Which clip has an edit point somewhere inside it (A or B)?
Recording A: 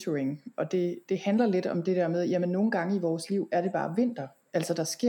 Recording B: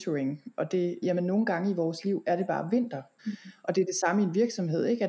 B